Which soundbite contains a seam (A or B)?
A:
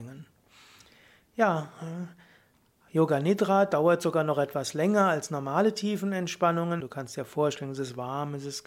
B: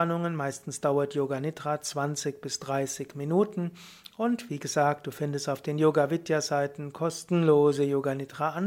A